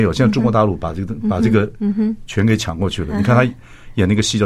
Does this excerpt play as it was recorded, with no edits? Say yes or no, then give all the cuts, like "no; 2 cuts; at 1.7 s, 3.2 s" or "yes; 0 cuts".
yes; 0 cuts